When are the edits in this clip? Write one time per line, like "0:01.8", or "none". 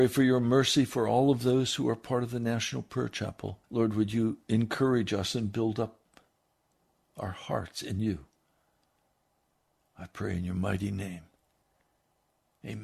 0:03.6